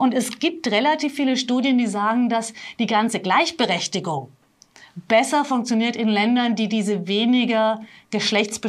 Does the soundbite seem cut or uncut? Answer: uncut